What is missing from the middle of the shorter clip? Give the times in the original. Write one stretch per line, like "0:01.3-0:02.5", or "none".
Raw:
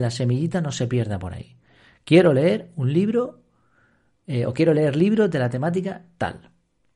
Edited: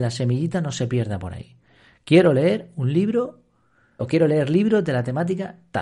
0:04.0-0:04.5